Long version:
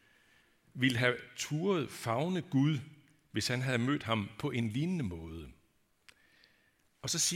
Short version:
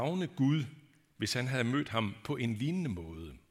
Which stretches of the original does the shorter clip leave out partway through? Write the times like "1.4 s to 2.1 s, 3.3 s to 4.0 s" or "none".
none